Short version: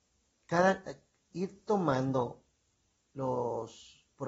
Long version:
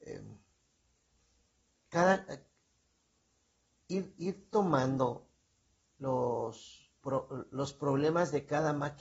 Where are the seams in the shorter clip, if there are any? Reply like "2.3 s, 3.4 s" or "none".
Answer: 1.3 s